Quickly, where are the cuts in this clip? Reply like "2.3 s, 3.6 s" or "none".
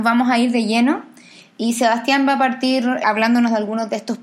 none